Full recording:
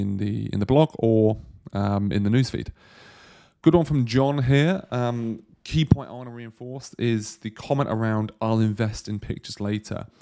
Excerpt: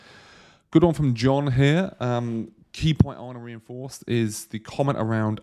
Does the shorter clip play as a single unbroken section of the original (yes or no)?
yes